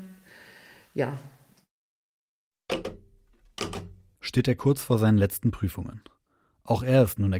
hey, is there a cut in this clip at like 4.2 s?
yes; 1 cut; at 4.2 s

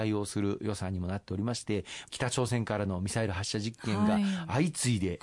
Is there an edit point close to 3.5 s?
no; 1 cut; at 2.1 s

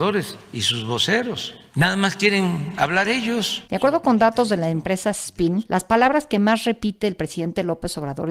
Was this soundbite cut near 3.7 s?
no; 1 cut; at 5.7 s

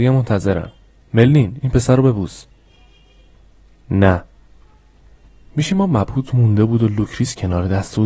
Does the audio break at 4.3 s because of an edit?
no; 0 cuts

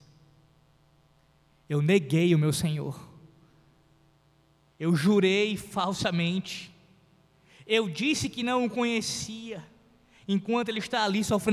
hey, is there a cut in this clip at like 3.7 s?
no; 0 cuts

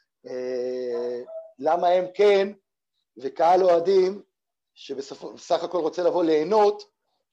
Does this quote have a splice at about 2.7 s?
no; 0 cuts

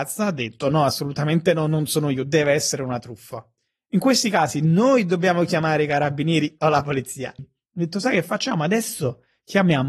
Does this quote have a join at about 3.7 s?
no; 1 cut; at 7.4 s

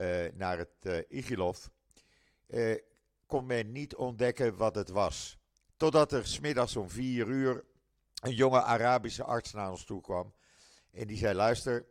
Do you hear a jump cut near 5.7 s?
yes; 1 cut; at 5.7 s

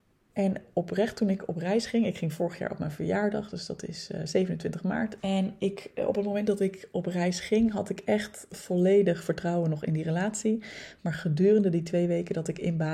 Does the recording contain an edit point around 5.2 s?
yes; 1 cut; at 5.2 s

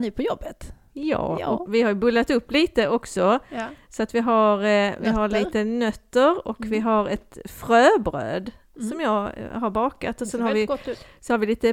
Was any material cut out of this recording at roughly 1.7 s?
yes; 1 cut; at 1.7 s

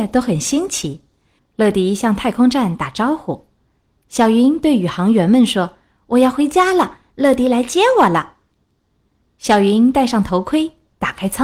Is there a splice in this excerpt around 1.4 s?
yes; 1 cut; at 1.4 s

